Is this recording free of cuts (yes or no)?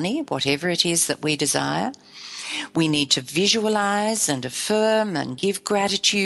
yes